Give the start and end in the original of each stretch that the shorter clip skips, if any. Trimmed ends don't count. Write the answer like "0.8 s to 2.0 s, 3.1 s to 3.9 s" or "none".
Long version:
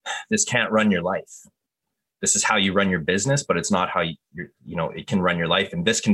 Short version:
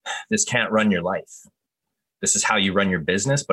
none